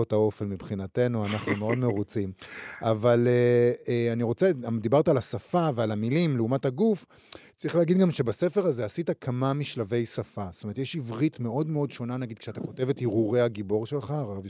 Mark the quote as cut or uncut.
uncut